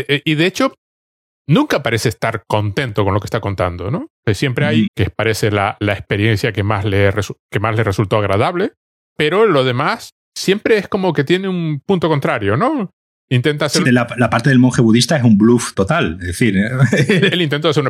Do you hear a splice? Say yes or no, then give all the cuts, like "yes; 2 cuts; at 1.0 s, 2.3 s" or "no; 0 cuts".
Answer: yes; 3 cuts; at 4.9 s, 10.2 s, 13.8 s